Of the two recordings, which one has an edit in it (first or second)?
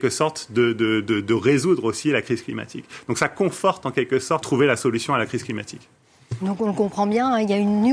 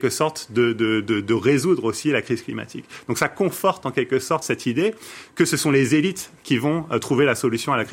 first